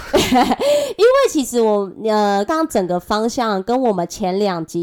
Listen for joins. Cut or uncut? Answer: cut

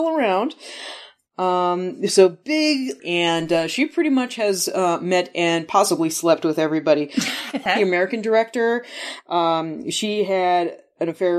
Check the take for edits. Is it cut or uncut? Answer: cut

